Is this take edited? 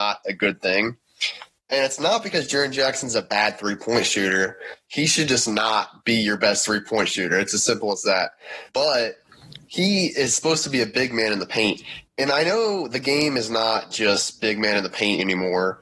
yes; 1 cut; at 8.7 s

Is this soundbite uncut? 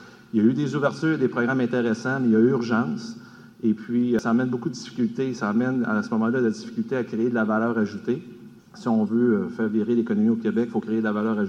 yes; 0 cuts

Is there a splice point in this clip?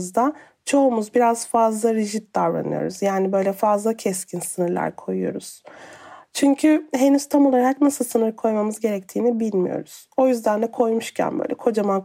no; 0 cuts

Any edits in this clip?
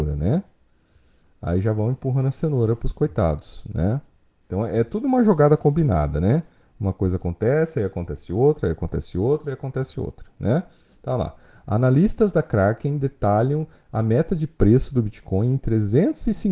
no; 0 cuts

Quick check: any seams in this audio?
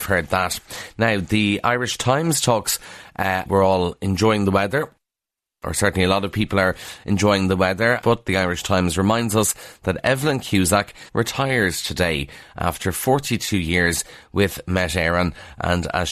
yes; 3 cuts; at 3.5 s, 8.0 s, 11.1 s

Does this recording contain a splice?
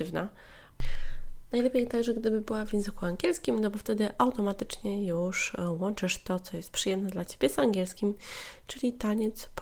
no; 0 cuts

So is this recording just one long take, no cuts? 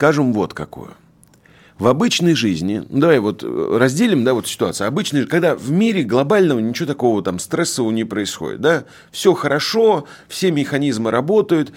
yes; 0 cuts

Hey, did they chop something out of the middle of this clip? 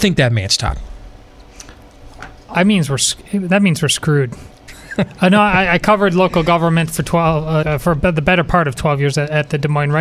yes; 1 cut; at 7.6 s

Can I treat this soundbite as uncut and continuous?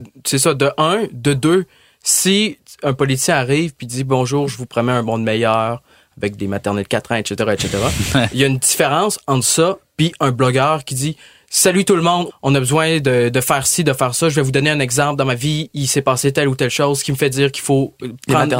no; 1 cut; at 12.3 s

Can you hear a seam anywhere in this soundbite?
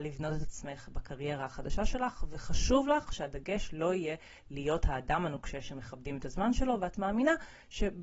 no; 0 cuts

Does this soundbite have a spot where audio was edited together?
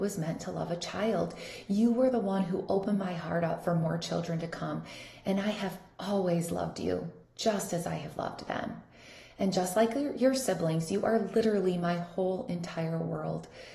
no; 0 cuts

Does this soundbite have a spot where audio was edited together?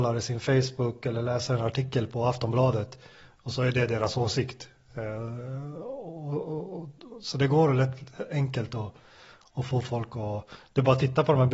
no; 0 cuts

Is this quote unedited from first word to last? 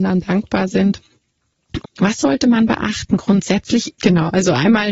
no; 2 cuts; at 1.8 s, 4.0 s

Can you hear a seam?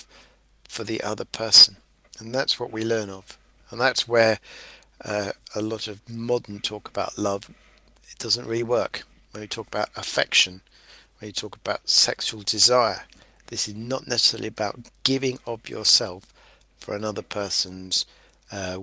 no; 0 cuts

